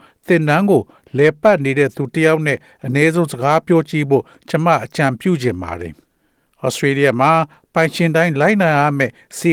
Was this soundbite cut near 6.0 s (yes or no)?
yes